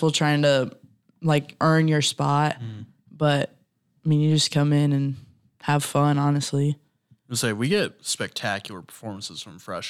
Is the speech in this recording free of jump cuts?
yes; 0 cuts

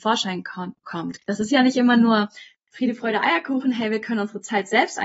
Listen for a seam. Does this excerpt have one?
yes; 1 cut; at 1.2 s

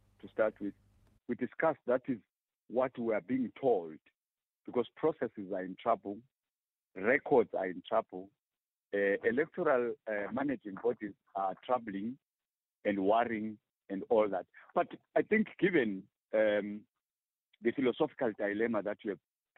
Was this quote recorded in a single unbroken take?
yes; 0 cuts

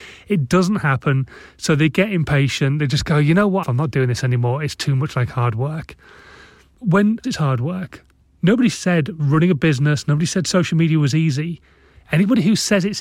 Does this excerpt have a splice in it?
yes; 2 cuts; at 3.6 s, 7.2 s

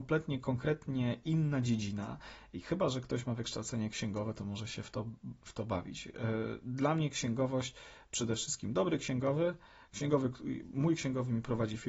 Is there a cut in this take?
no; 0 cuts

